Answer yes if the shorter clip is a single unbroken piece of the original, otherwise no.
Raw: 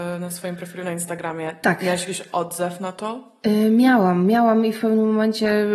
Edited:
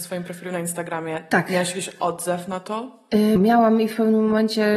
no